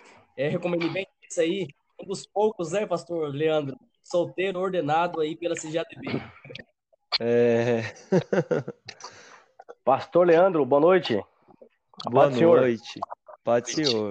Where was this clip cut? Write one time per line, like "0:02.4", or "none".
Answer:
none